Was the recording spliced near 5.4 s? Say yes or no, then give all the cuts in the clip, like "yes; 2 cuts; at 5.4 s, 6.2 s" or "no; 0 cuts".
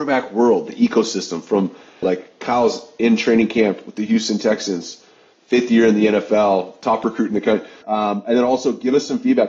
no; 2 cuts; at 2.0 s, 7.8 s